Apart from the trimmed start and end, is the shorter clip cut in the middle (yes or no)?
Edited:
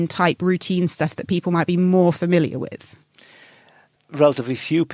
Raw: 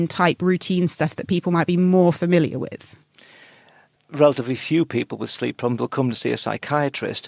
no